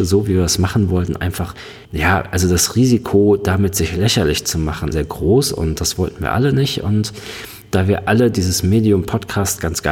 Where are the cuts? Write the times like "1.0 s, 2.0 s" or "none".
1.9 s, 4.9 s